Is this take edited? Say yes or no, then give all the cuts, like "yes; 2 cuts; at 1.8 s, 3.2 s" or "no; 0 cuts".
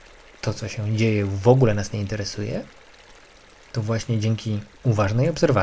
yes; 1 cut; at 3.7 s